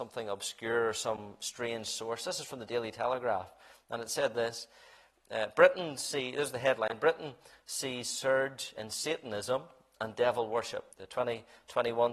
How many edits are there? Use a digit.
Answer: 1